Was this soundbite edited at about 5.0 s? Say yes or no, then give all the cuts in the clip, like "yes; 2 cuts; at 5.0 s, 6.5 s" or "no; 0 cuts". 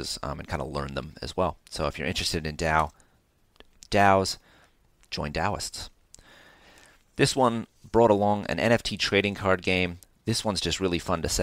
no; 0 cuts